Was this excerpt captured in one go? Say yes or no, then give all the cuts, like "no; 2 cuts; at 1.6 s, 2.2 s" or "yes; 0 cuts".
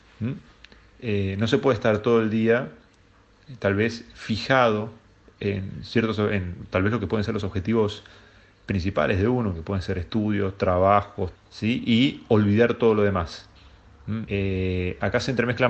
no; 2 cuts; at 11.4 s, 14.3 s